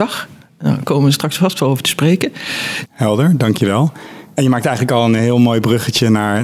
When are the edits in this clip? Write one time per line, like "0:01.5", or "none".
0:02.9